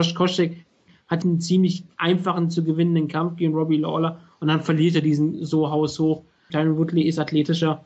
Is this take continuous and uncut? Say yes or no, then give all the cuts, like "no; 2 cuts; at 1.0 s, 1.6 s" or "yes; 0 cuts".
no; 2 cuts; at 1.2 s, 6.5 s